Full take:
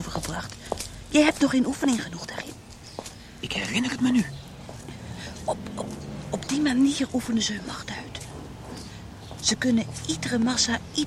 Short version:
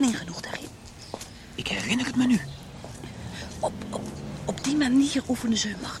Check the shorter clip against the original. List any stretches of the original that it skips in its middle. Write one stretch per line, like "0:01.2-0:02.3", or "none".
none